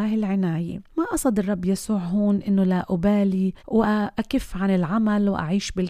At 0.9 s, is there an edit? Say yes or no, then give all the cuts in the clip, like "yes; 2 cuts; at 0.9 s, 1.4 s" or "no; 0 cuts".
yes; 2 cuts; at 0.9 s, 3.6 s